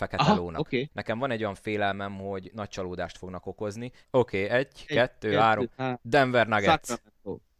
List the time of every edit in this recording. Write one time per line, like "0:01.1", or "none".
0:00.9
0:04.0